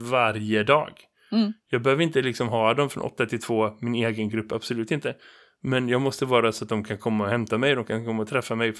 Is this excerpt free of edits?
yes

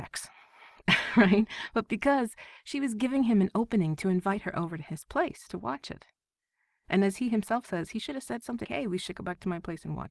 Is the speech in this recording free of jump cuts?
no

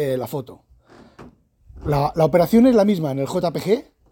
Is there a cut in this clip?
no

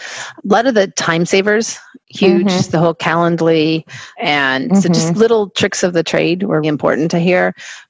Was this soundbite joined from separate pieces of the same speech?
yes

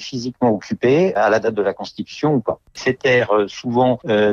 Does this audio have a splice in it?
yes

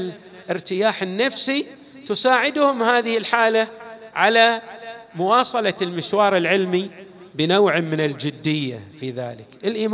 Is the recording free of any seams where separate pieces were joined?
yes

